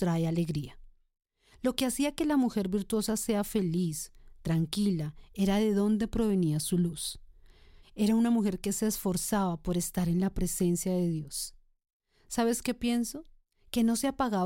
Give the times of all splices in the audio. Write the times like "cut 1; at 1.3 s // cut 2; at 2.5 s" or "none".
cut 1; at 7.8 s